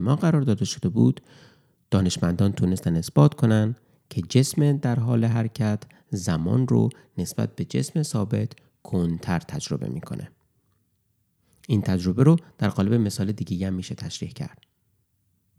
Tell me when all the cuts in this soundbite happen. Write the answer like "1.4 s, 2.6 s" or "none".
none